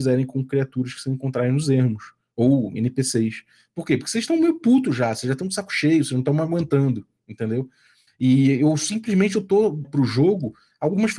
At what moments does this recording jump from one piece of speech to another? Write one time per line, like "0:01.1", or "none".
0:08.1
0:09.8